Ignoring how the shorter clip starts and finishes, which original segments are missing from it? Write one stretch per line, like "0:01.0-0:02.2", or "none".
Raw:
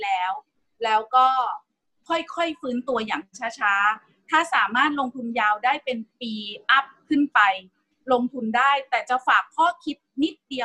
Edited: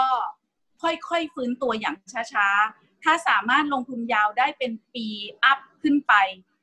none